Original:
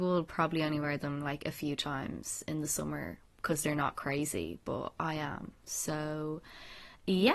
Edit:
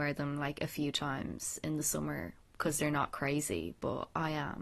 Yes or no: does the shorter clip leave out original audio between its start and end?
no